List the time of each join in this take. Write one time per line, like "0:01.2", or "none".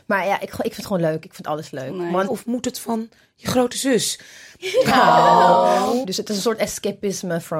0:02.3
0:04.6
0:06.0